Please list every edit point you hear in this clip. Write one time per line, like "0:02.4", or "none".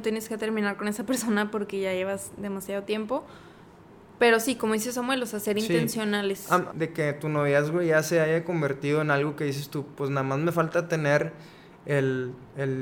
0:06.7